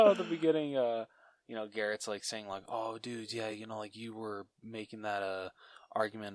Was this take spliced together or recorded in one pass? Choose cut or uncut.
uncut